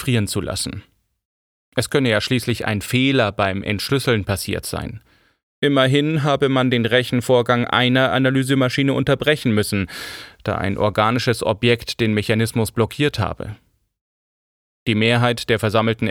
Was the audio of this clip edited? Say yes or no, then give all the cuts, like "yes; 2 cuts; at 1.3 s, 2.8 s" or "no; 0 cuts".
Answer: no; 0 cuts